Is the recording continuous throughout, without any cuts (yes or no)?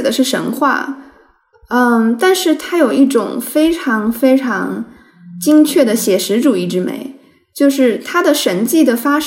yes